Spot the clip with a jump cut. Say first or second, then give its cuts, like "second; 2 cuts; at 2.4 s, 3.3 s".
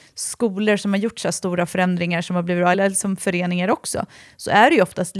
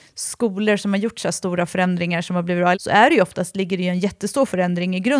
second; 1 cut; at 2.7 s